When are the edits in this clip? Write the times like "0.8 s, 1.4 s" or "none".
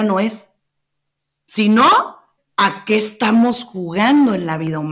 2.4 s